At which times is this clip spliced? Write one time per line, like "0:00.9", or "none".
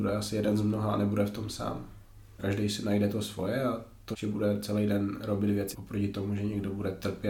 0:02.4
0:04.1
0:05.7